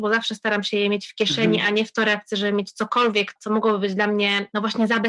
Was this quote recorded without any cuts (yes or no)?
yes